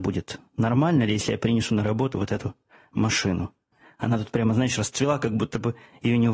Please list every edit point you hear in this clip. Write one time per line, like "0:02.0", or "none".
none